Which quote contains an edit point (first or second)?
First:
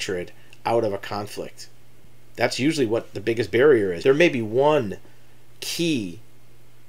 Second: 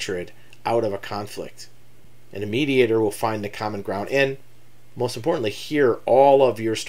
first